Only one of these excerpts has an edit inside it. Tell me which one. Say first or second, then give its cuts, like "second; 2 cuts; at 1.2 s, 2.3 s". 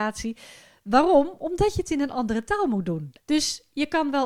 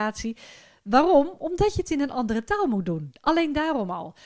first; 1 cut; at 3.2 s